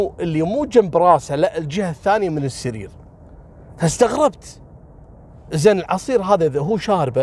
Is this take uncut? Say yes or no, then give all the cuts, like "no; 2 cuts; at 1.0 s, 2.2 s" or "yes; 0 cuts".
yes; 0 cuts